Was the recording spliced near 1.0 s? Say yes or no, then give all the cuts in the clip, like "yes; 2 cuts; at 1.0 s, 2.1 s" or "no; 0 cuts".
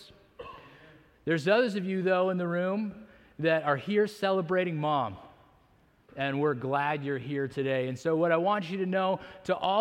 no; 1 cut; at 6.1 s